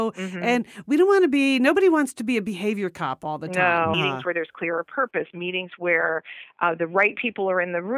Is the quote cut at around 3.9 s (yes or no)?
yes